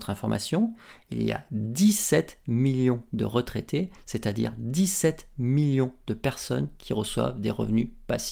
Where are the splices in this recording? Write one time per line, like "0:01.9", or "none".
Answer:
none